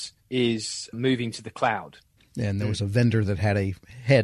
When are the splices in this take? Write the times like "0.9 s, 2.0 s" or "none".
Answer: 2.2 s